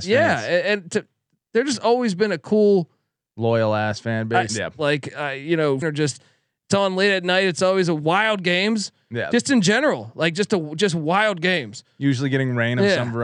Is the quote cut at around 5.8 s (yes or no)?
yes